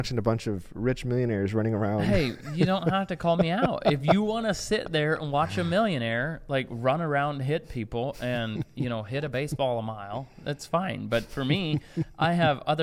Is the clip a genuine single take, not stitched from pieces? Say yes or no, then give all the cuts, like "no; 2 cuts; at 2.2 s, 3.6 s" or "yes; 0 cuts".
yes; 0 cuts